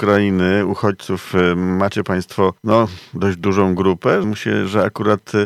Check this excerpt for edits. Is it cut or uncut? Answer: cut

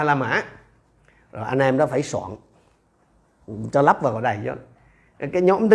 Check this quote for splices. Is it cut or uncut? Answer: uncut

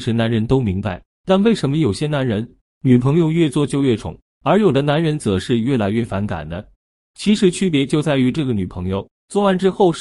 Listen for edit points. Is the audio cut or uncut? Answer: uncut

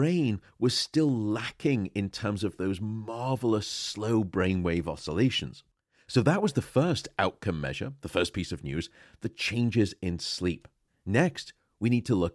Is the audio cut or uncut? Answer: uncut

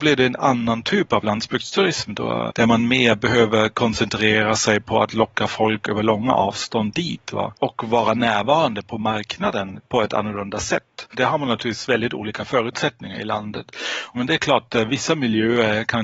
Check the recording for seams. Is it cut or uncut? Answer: cut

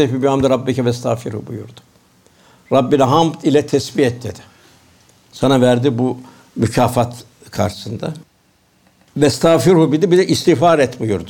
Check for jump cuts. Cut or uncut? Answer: uncut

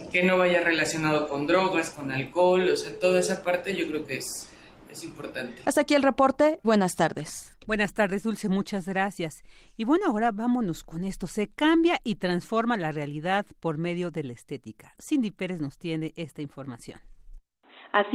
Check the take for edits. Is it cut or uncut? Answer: cut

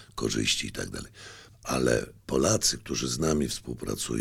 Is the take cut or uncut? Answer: cut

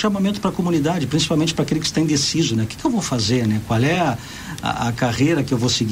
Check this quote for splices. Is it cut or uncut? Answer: uncut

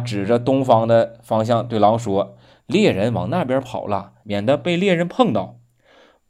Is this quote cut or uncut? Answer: cut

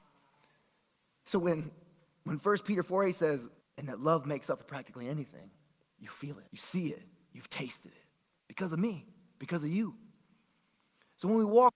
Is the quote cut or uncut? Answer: cut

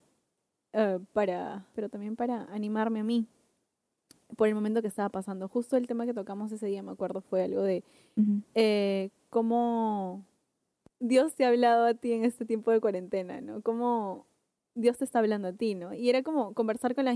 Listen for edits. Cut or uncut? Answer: cut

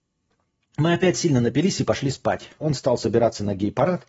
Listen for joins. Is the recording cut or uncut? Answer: cut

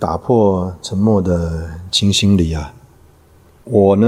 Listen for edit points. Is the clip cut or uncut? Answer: uncut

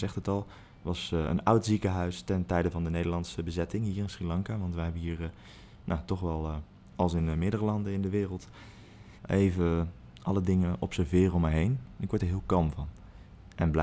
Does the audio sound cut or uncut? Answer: cut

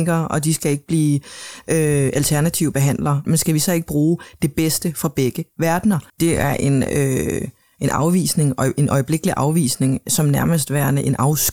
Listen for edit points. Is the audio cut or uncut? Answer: cut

